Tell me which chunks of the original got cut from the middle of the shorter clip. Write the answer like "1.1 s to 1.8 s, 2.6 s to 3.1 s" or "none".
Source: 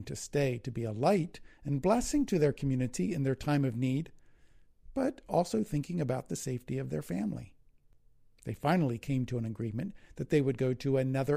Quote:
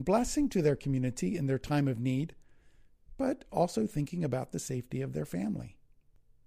none